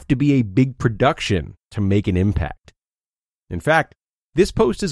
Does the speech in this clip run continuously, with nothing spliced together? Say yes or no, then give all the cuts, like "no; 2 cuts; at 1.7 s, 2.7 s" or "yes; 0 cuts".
yes; 0 cuts